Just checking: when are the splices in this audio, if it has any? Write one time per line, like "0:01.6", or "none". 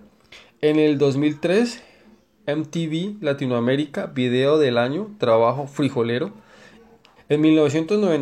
0:07.2